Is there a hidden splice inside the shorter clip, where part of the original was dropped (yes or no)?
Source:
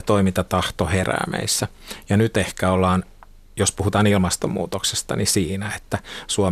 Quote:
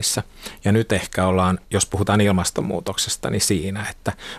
yes